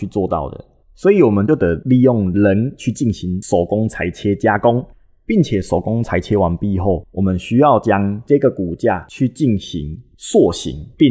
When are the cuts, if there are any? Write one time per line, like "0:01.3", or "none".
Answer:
none

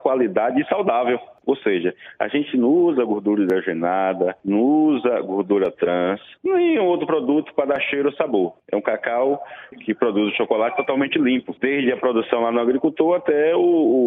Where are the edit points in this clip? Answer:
0:01.4

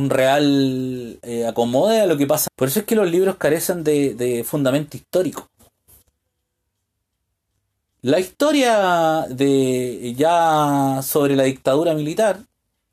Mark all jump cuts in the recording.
0:02.5
0:07.9

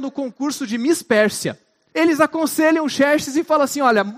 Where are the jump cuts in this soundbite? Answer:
0:01.9

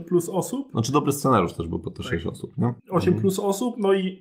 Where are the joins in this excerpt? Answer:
0:02.8

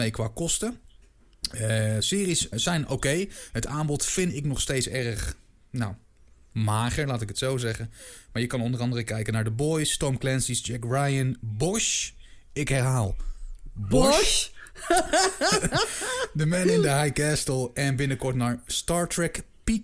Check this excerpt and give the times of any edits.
0:02.5

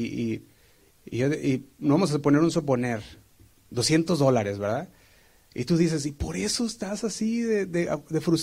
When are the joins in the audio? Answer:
none

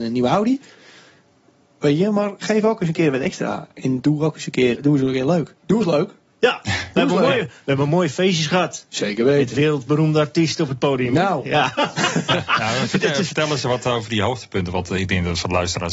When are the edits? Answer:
0:04.7

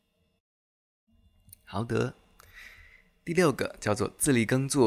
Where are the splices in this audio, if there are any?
none

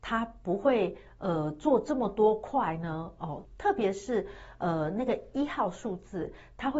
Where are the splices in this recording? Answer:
0:03.4

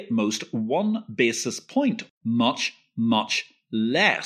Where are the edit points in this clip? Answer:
0:02.1

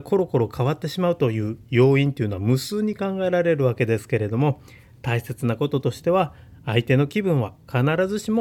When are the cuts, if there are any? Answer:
none

